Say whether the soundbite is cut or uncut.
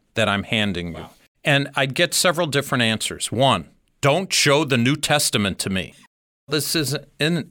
cut